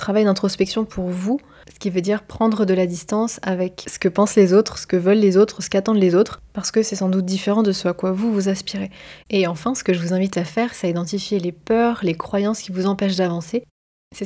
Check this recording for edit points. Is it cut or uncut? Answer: cut